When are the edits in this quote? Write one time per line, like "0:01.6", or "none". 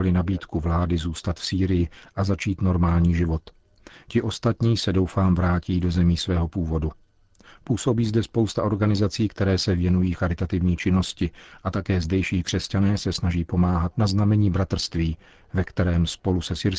0:13.9